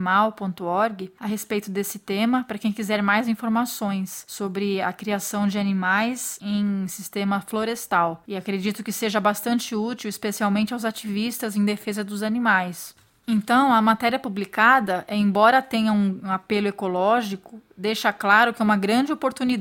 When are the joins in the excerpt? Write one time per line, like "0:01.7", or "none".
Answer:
none